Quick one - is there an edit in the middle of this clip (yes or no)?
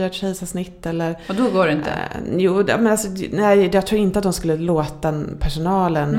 no